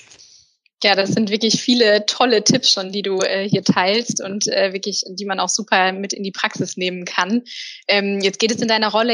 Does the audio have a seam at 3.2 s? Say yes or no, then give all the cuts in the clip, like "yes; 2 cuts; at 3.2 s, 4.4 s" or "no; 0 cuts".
no; 0 cuts